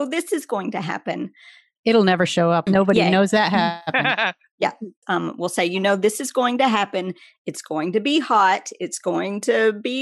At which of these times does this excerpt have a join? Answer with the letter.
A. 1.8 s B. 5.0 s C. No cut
B